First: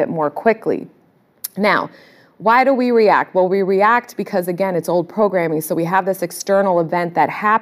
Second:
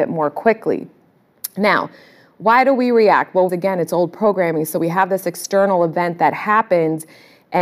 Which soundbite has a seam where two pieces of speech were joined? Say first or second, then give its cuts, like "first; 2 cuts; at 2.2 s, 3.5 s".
second; 1 cut; at 3.5 s